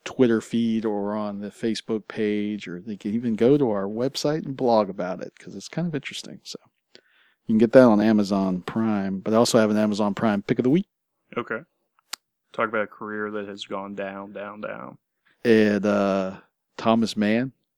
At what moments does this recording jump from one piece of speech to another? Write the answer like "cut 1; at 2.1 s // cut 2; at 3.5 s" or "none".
cut 1; at 12.4 s